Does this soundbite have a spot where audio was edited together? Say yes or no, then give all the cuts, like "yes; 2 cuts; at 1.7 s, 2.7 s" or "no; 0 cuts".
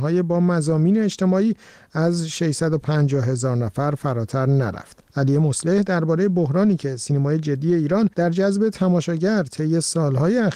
yes; 1 cut; at 8.1 s